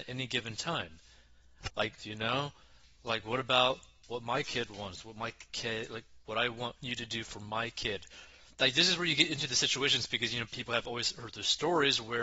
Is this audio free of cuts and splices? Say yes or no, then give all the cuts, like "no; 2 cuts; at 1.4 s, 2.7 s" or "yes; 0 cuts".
no; 2 cuts; at 2.0 s, 6.2 s